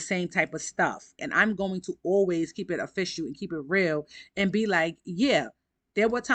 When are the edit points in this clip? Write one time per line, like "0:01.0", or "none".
0:01.2